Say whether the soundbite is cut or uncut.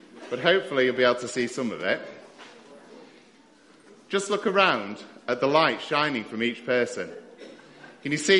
uncut